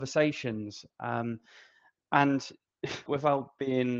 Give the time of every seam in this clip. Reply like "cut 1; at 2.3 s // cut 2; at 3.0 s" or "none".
cut 1; at 3.1 s